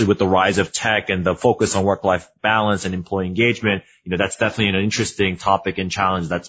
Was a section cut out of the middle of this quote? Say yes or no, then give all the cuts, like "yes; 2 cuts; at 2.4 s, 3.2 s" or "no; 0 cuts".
no; 0 cuts